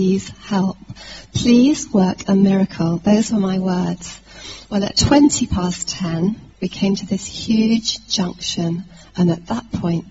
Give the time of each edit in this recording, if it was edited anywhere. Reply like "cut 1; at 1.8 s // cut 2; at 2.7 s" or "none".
cut 1; at 6.5 s